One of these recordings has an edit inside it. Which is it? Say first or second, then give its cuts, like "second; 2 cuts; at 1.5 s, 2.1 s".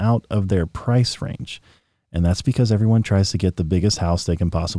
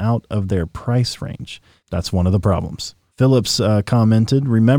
second; 2 cuts; at 1.8 s, 3.1 s